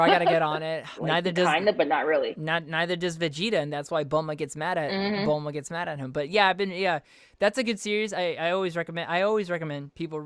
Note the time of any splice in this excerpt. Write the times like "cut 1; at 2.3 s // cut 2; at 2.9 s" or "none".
cut 1; at 1.0 s